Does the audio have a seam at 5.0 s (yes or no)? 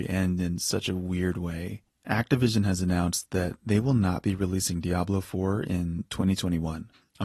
no